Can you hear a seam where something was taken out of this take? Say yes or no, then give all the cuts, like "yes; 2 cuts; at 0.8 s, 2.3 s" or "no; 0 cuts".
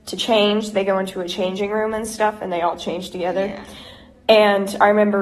no; 0 cuts